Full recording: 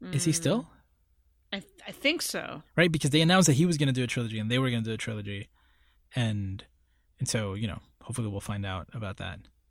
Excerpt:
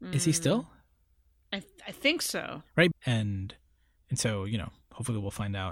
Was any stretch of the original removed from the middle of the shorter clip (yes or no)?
yes